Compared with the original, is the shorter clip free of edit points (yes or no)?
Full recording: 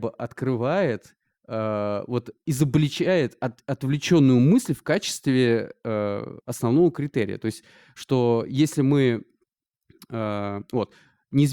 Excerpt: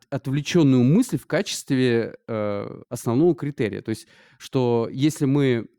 yes